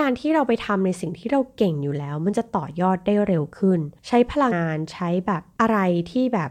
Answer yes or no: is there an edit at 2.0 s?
no